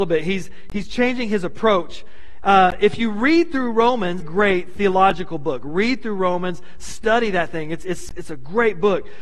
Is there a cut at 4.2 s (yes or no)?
yes